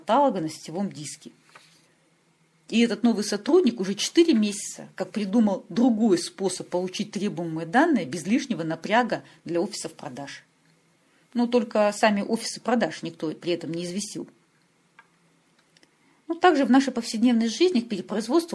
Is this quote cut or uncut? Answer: uncut